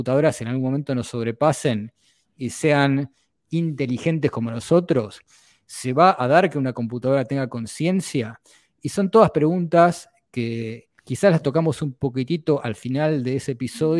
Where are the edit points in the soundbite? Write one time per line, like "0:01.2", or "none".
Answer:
0:11.0